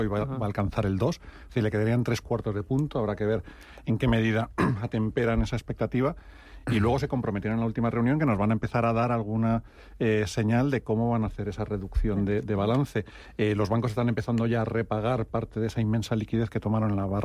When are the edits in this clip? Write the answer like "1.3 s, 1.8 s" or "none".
none